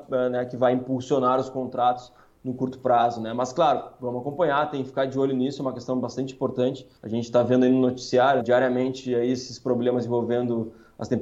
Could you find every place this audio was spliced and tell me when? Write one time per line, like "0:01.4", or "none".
0:07.0
0:08.4